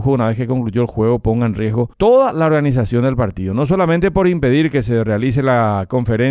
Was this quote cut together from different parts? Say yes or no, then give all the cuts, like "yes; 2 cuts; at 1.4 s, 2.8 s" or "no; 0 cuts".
yes; 1 cut; at 1.9 s